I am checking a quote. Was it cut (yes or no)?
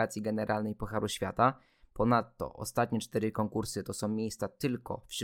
no